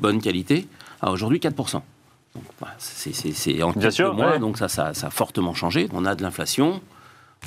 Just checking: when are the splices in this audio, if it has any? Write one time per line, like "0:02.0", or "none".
0:05.9